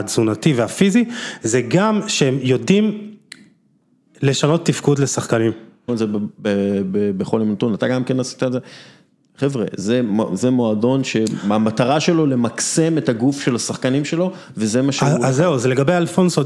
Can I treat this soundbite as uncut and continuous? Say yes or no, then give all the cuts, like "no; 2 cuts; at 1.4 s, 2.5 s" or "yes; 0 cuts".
no; 1 cut; at 5.9 s